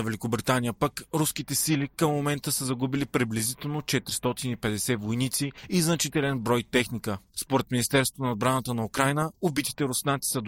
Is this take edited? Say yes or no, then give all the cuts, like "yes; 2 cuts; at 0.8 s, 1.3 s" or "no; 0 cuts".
yes; 1 cut; at 7.3 s